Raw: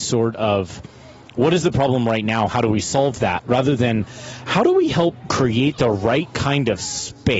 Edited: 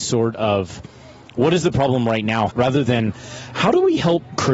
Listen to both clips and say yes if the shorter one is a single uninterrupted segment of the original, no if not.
no